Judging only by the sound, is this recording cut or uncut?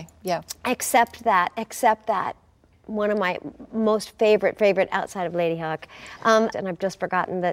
cut